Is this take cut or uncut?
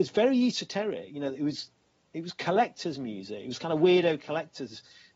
uncut